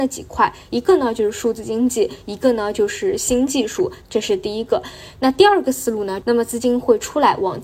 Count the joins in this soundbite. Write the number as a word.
two